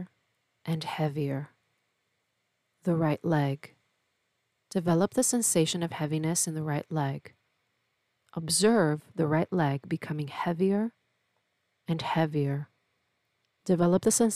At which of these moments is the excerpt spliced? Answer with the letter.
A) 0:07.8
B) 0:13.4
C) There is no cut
B